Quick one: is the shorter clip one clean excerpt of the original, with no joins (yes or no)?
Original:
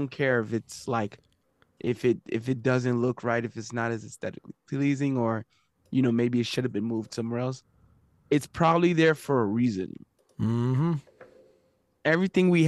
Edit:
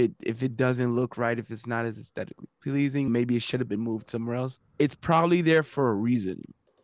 no